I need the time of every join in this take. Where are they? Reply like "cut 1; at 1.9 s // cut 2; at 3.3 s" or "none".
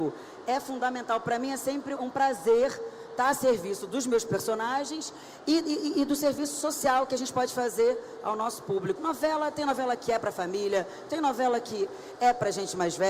cut 1; at 2.0 s // cut 2; at 9.0 s // cut 3; at 11.1 s